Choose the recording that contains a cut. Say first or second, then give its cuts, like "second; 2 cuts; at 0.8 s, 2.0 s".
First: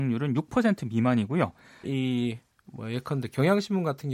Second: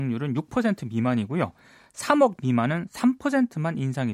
first; 1 cut; at 1.8 s